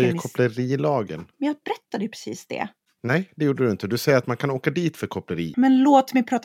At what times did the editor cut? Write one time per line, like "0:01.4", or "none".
0:01.3
0:05.5